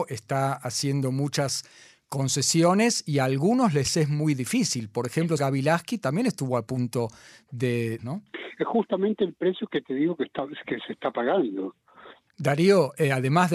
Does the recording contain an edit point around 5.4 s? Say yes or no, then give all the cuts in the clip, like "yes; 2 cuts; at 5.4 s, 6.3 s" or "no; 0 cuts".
yes; 3 cuts; at 5.4 s, 8.0 s, 12.3 s